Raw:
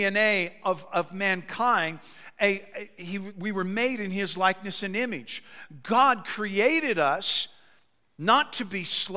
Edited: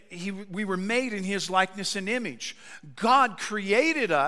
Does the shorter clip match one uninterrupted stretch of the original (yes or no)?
yes